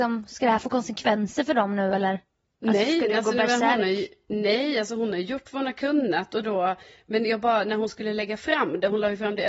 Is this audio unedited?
yes; 0 cuts

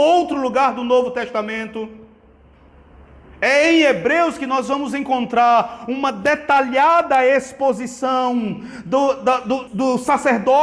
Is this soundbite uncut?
no; 1 cut; at 9.7 s

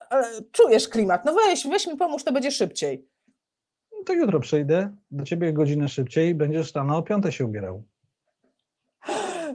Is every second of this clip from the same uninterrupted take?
yes; 0 cuts

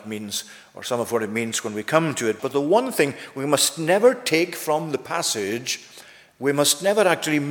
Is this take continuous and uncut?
no; 1 cut; at 2.4 s

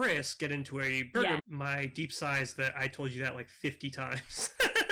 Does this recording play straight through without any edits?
no; 1 cut; at 1.4 s

